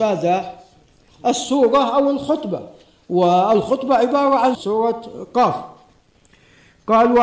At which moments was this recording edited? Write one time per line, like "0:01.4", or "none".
0:04.5